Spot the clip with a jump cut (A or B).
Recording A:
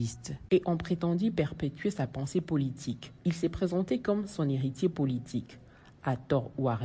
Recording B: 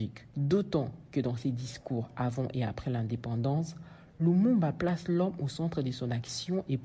A